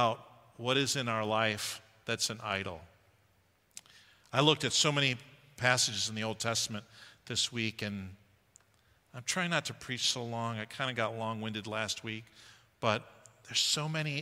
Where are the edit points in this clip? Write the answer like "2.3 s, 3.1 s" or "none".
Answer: none